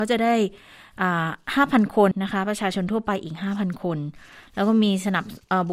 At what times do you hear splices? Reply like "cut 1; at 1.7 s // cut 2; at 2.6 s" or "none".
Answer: cut 1; at 2.1 s

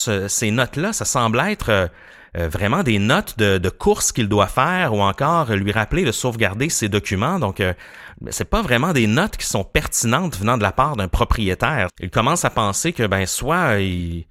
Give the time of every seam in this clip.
cut 1; at 11.9 s

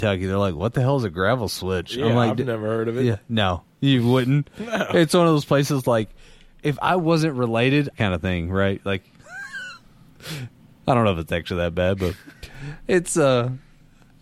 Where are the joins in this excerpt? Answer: cut 1; at 7.9 s

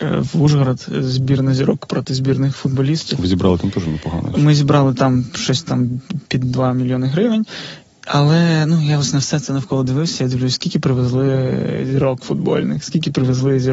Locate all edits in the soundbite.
none

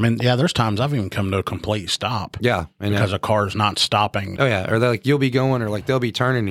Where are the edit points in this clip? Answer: cut 1; at 4.4 s

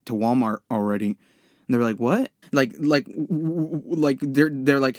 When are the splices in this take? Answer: cut 1; at 2.4 s

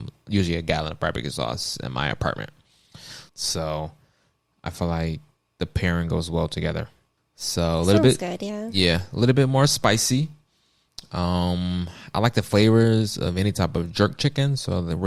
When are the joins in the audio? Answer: cut 1; at 3.3 s // cut 2; at 7.2 s

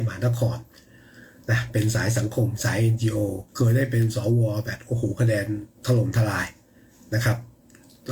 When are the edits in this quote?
cut 1; at 3.5 s // cut 2; at 5.8 s

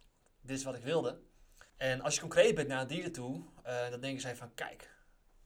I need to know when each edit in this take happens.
cut 1; at 1.7 s

